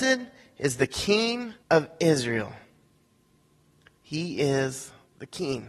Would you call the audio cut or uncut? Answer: cut